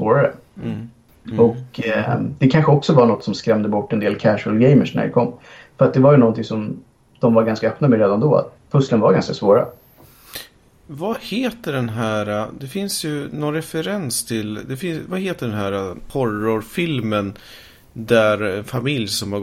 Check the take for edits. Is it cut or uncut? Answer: uncut